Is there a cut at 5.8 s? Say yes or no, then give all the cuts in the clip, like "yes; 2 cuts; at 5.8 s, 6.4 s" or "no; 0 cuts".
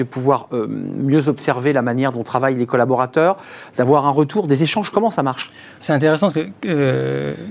yes; 1 cut; at 5.8 s